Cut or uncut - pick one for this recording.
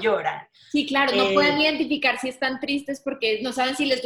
uncut